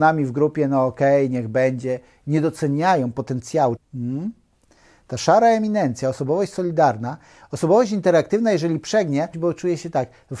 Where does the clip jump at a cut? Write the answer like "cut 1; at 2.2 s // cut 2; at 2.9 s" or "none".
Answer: cut 1; at 3.8 s // cut 2; at 9.3 s